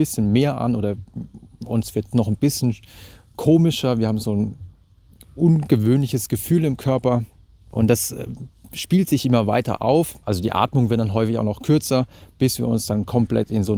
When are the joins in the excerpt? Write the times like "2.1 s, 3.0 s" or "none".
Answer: none